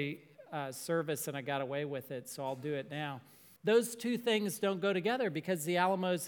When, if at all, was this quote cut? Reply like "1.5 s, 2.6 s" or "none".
3.6 s